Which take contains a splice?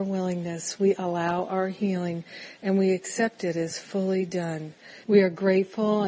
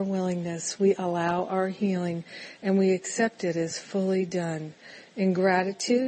first; 1 cut; at 5.0 s

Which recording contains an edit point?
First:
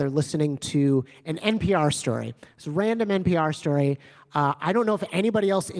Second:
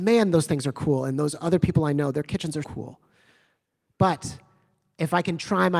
second; 1 cut; at 2.6 s

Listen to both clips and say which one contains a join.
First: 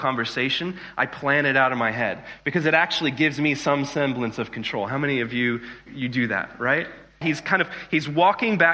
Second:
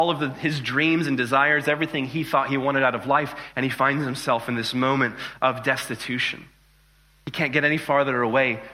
first; 2 cuts; at 5.9 s, 7.2 s

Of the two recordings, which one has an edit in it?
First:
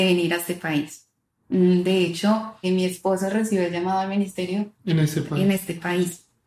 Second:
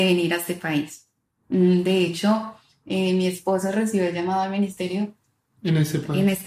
first; 2 cuts; at 2.6 s, 4.8 s

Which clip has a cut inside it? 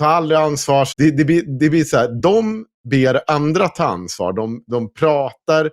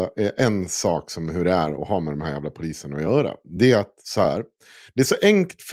first; 1 cut; at 0.9 s

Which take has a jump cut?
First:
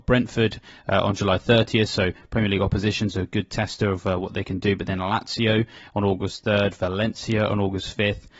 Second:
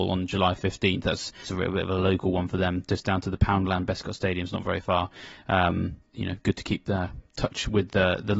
second; 2 cuts; at 1.5 s, 6.1 s

